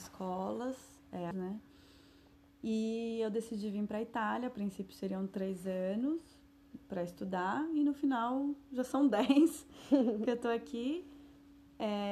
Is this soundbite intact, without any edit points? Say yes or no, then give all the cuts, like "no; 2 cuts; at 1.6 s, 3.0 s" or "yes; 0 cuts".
no; 1 cut; at 1.3 s